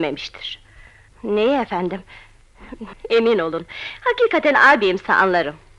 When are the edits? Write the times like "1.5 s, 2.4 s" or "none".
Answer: 1.1 s, 2.9 s